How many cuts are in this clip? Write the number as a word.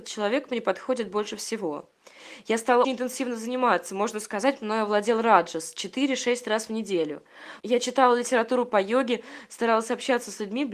two